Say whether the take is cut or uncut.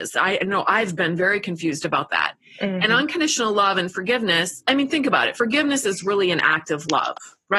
uncut